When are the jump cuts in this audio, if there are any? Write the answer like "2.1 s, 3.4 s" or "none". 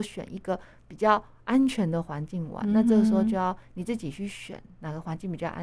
none